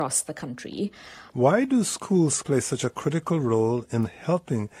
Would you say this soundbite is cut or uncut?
cut